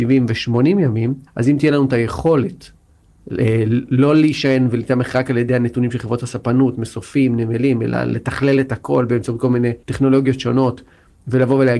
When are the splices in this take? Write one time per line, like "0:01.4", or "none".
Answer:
0:01.3
0:09.8

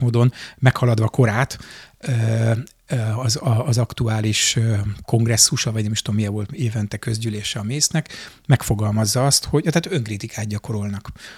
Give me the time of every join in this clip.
none

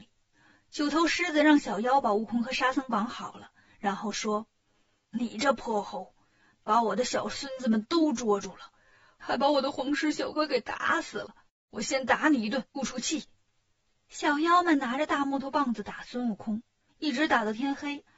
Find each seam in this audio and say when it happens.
0:10.3
0:12.8
0:16.9

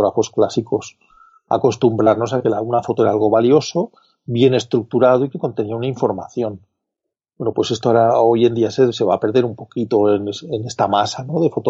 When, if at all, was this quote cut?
none

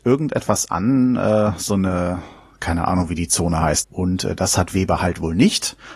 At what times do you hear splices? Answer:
0:03.8

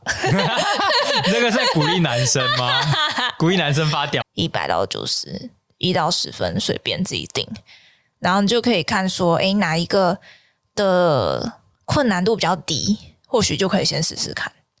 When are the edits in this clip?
0:04.2

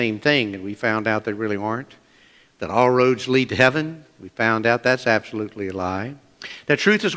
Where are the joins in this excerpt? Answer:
none

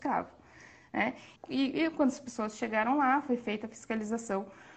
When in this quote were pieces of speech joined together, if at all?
0:01.4

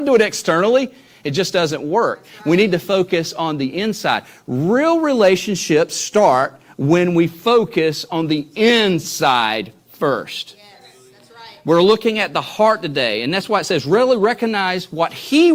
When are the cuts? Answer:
none

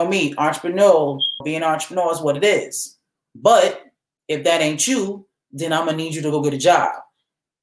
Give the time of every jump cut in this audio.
0:01.4

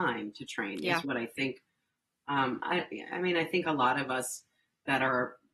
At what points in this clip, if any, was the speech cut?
0:01.0

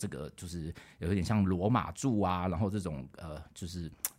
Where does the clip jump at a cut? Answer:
none

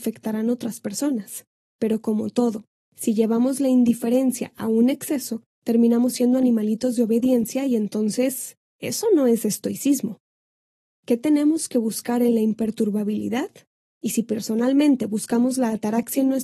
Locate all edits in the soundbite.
0:13.9

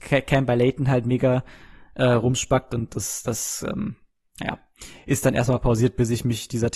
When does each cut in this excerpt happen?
none

